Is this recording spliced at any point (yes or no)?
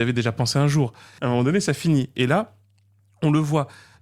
yes